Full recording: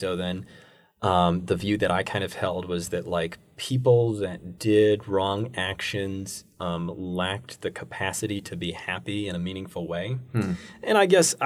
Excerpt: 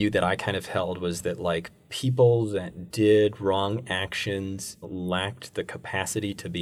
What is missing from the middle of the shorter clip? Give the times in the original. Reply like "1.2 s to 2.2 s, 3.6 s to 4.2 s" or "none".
6.5 s to 6.9 s